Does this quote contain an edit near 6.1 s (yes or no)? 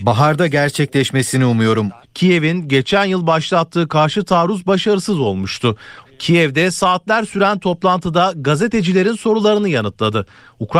yes